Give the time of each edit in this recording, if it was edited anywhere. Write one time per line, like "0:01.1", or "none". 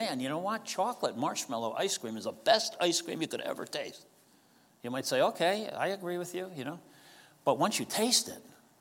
none